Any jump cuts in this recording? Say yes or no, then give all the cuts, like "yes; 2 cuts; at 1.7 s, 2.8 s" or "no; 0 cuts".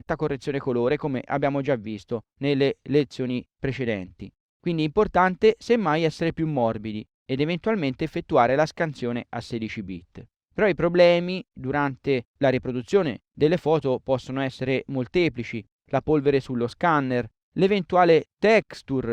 no; 0 cuts